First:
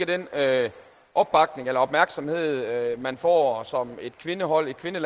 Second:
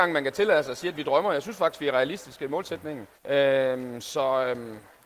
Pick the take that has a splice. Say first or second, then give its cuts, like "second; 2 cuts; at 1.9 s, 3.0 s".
second; 1 cut; at 3.2 s